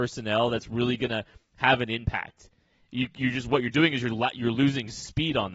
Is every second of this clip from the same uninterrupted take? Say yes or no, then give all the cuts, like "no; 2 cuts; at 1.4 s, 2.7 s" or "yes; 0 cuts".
yes; 0 cuts